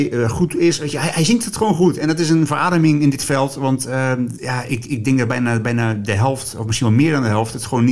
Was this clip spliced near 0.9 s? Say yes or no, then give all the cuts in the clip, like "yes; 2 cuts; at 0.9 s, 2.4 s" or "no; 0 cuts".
no; 1 cut; at 4.4 s